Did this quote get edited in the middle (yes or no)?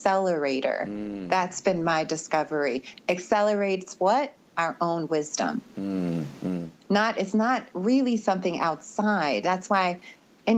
no